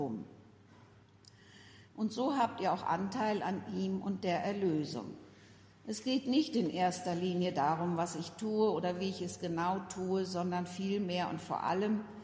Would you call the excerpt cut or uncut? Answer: cut